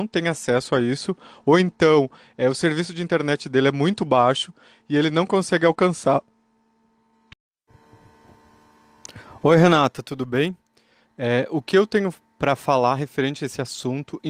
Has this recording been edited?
no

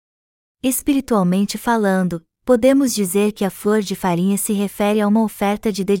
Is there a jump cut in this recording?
no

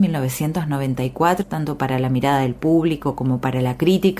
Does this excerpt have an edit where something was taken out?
yes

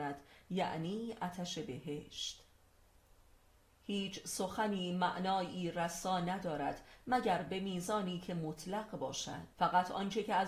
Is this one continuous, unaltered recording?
no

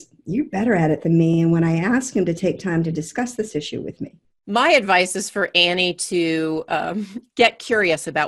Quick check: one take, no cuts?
yes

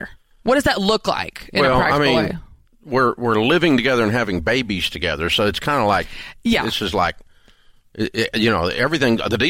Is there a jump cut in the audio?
no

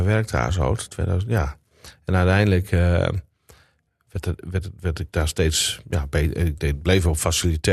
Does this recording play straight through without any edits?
yes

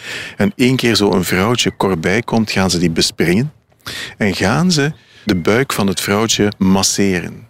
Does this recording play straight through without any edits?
yes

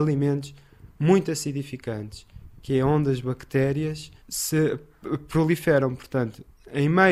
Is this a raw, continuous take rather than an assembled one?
no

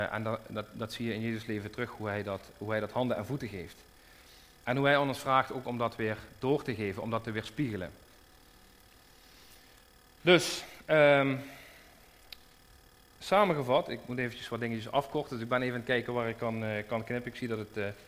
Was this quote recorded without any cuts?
yes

